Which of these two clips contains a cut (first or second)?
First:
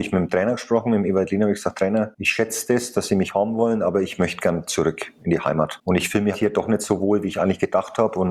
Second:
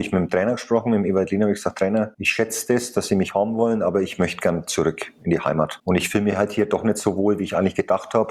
first